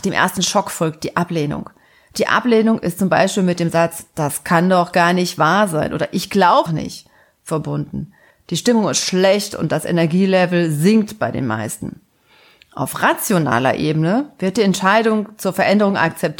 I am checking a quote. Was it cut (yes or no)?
yes